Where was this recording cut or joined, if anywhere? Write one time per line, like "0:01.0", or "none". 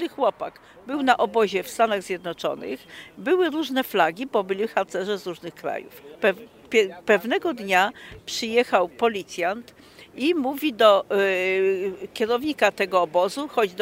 0:06.1